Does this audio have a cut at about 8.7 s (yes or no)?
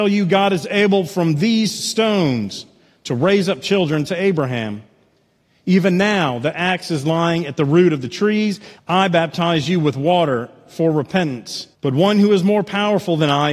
yes